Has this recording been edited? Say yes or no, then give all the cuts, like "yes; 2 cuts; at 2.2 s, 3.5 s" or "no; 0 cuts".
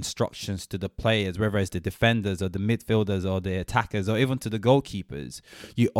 no; 0 cuts